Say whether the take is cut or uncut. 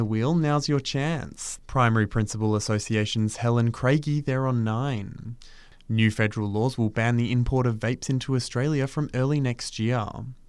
cut